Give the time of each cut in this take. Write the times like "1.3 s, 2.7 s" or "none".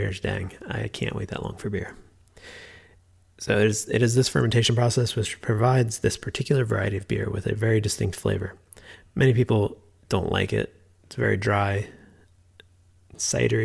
none